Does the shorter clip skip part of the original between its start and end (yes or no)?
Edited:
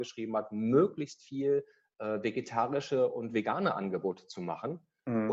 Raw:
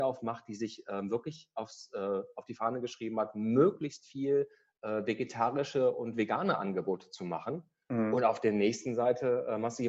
no